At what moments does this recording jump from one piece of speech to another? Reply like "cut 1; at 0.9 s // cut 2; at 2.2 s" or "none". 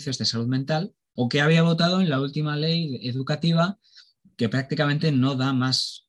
cut 1; at 1.2 s